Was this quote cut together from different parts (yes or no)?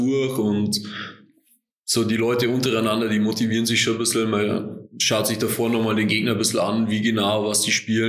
no